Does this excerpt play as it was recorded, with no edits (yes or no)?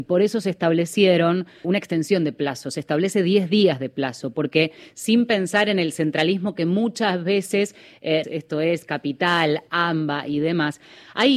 no